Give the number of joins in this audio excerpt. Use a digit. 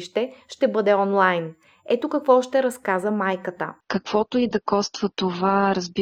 1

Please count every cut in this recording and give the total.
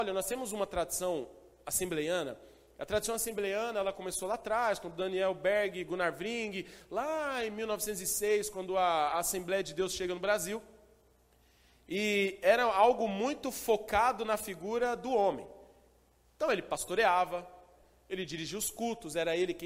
0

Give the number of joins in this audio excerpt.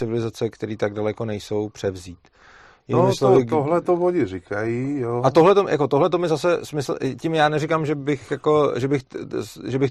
0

